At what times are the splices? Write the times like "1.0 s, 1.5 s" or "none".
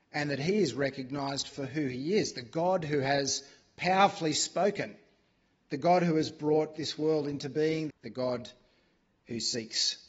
7.9 s